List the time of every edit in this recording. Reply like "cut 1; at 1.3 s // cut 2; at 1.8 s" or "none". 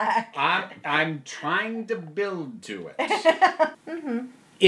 cut 1; at 3.7 s

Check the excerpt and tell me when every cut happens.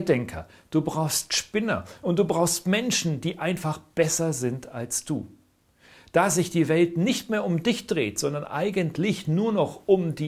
none

